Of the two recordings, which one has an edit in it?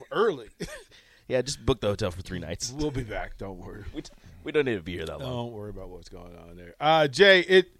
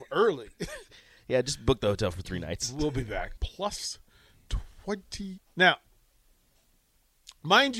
second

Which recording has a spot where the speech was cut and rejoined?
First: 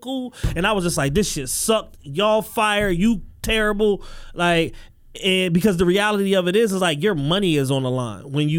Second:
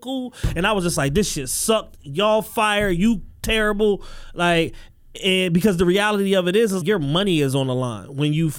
second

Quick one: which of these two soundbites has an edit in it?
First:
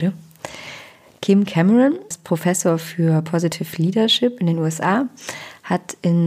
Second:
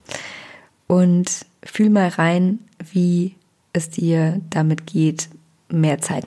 first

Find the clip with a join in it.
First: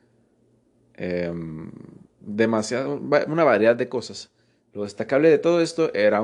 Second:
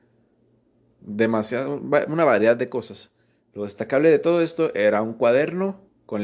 second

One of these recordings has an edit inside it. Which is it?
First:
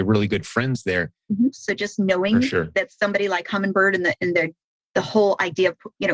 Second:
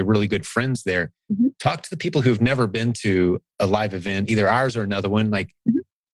first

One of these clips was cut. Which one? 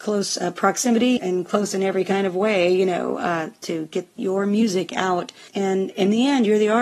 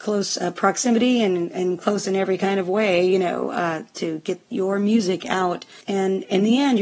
first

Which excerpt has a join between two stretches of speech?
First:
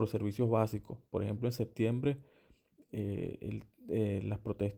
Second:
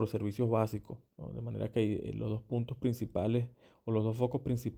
second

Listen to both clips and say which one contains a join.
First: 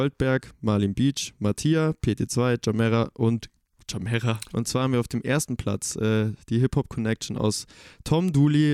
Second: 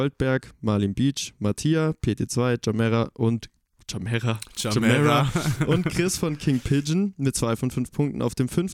first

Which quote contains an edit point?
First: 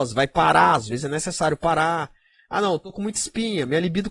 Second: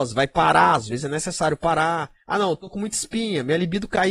second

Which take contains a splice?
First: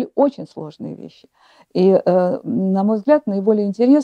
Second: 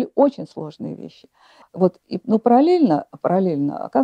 second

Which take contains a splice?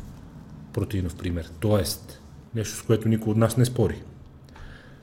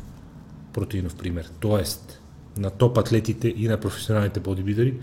first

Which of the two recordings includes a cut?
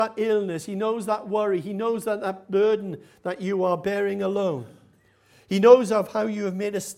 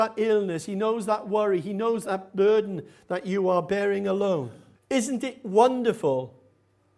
second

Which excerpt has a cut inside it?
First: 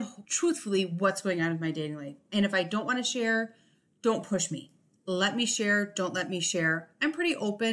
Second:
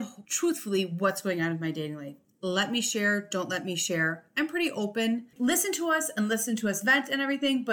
second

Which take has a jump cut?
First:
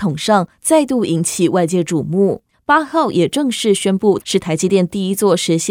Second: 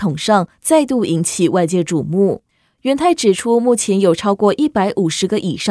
first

